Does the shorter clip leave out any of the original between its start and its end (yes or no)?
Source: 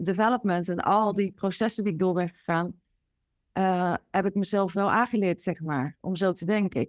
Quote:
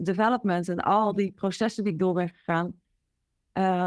no